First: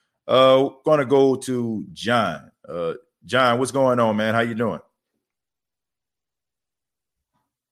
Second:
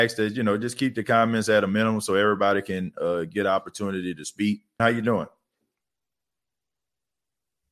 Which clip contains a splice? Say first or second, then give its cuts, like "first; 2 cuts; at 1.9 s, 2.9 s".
second; 1 cut; at 4.8 s